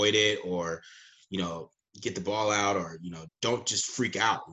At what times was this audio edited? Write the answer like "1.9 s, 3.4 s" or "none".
3.3 s